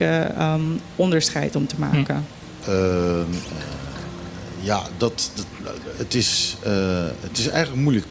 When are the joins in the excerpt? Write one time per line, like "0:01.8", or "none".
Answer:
0:02.6
0:05.9